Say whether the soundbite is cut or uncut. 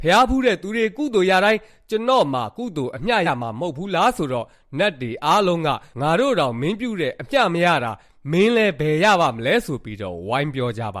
cut